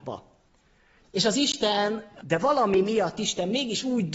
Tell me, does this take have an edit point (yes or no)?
yes